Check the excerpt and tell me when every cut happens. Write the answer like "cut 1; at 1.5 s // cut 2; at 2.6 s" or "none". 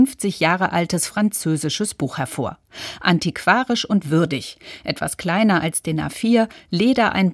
none